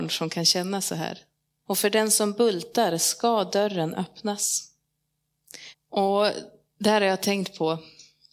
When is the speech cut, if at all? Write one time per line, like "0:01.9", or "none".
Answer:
0:01.7
0:05.7